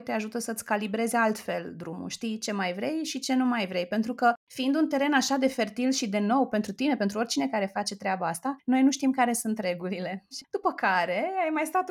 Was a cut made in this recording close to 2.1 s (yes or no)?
no